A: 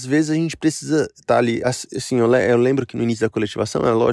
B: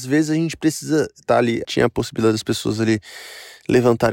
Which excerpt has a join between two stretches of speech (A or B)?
B